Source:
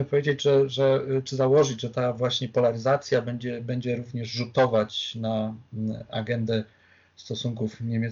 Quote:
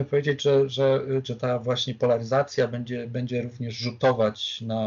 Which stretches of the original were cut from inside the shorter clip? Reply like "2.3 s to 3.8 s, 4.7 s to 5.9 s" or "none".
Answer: 1.2 s to 1.8 s